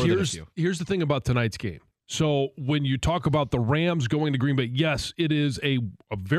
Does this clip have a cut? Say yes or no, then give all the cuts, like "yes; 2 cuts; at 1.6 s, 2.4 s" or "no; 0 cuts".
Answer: yes; 1 cut; at 1.9 s